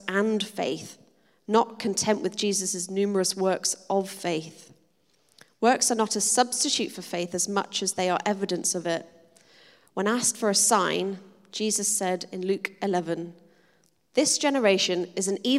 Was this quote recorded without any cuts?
yes; 0 cuts

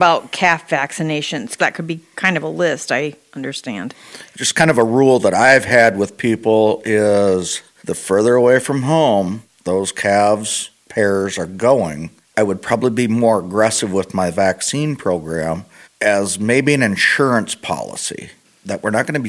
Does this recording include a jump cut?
yes; 3 cuts; at 1.6 s, 4.3 s, 10.9 s

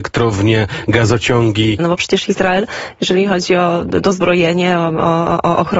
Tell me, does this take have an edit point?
yes; 1 cut; at 1.8 s

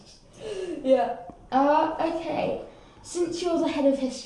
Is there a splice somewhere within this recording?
no; 0 cuts

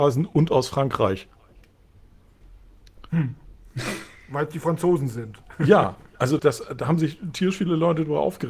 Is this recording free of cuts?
no; 1 cut; at 6.4 s

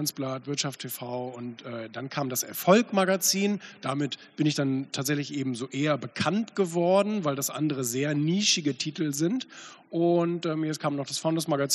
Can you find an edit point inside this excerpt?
no; 0 cuts

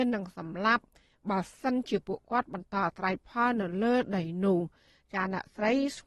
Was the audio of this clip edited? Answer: no; 0 cuts

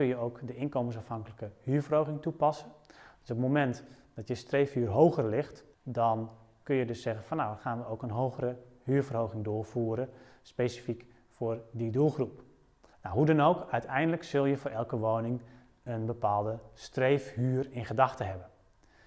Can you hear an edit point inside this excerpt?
yes; 2 cuts; at 5.7 s, 12.9 s

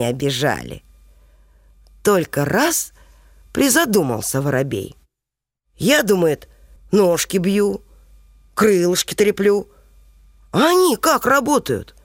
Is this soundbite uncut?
no; 1 cut; at 6.8 s

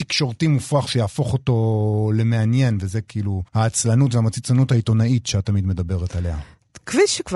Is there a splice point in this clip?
yes; 1 cut; at 3.5 s

